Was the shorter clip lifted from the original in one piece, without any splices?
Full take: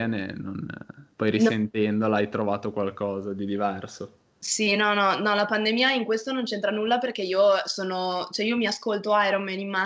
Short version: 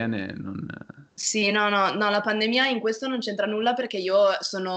no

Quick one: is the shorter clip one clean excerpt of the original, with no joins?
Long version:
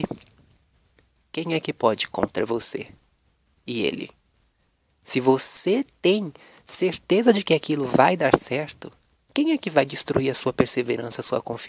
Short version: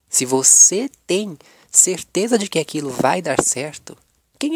yes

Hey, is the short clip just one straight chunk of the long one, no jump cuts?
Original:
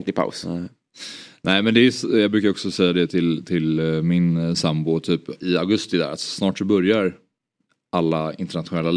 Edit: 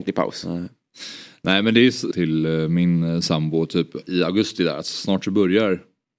no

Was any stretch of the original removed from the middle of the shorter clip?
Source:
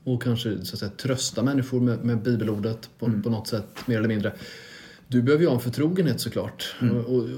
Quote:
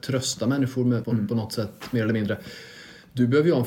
yes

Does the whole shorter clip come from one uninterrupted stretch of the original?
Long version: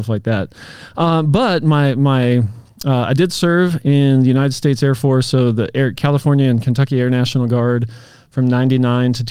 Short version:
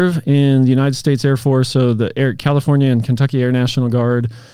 yes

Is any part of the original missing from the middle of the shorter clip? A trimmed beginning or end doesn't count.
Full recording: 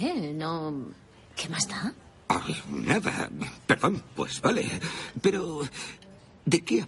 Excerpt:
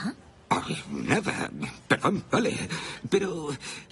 yes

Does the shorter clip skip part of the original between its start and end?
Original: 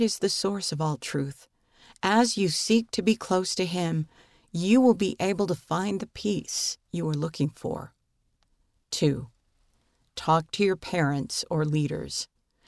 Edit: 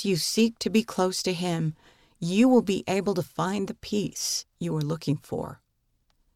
no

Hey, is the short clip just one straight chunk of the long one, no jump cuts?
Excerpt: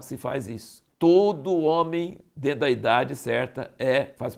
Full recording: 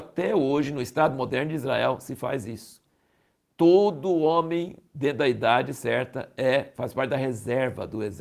no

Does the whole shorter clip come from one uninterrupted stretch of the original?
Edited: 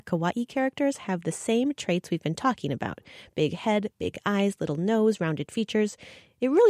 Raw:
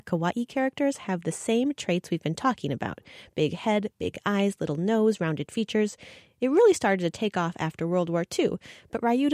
yes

